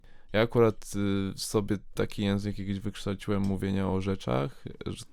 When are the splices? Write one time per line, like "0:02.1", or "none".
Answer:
none